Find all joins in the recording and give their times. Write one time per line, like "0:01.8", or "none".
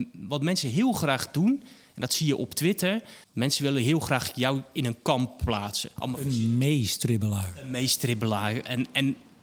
0:03.2
0:06.0